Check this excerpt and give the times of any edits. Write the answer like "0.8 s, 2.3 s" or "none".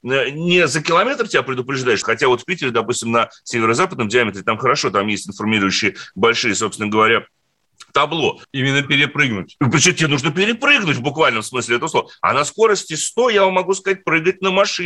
2.0 s, 8.4 s